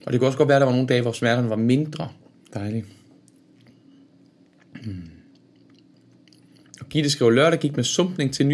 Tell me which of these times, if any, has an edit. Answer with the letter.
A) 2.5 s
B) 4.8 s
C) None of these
A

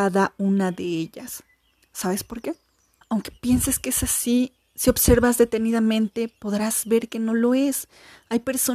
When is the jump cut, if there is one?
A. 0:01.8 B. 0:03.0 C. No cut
B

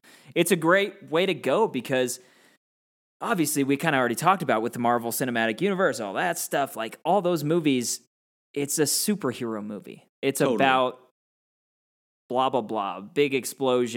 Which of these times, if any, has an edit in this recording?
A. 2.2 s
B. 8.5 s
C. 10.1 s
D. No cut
C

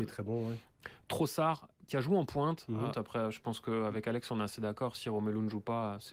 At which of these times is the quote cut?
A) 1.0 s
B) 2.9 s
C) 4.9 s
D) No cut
B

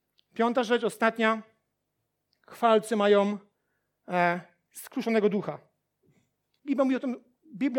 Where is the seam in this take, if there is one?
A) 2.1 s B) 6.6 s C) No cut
B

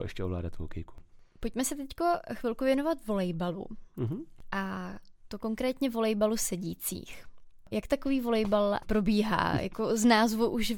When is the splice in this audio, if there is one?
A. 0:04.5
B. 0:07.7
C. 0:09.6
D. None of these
D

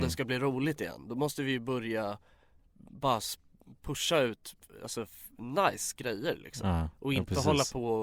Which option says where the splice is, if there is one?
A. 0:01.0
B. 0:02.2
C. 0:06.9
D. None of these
D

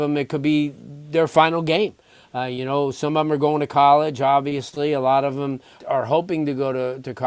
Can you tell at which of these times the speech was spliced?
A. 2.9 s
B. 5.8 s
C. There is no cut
B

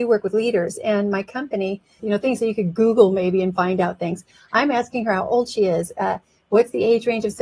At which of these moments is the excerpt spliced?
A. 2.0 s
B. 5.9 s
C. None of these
A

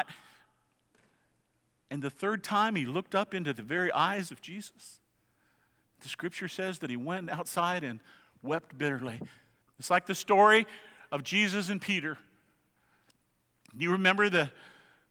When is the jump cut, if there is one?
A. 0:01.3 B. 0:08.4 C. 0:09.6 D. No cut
C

